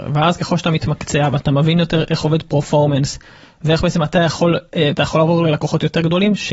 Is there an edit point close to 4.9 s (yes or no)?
yes